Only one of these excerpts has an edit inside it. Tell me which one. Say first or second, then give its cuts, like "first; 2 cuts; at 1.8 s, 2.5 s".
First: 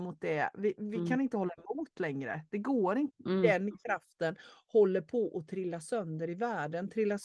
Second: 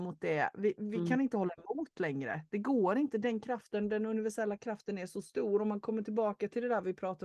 first; 1 cut; at 3.1 s